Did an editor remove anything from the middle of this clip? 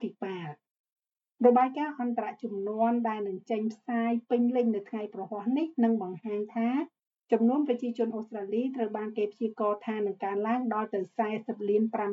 no; 0 cuts

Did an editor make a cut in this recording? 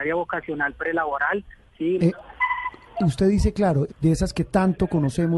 yes; 2 cuts; at 2.0 s, 3.9 s

